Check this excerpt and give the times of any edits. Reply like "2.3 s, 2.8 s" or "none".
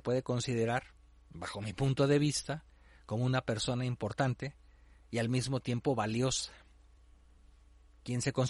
none